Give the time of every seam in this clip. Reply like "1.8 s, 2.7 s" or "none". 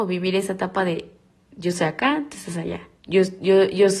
3.0 s